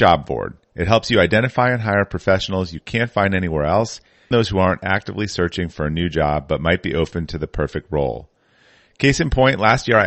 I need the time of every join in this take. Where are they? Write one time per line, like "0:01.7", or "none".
0:04.3